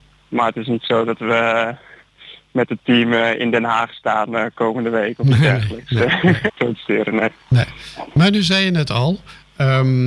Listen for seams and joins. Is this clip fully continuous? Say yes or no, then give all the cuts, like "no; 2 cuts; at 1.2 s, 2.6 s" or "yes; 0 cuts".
no; 1 cut; at 6.5 s